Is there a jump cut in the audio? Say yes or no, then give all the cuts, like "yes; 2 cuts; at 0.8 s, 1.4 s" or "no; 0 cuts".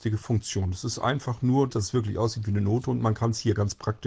yes; 1 cut; at 1.7 s